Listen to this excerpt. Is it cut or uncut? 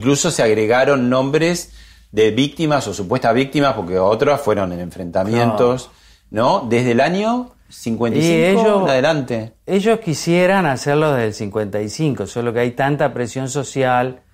uncut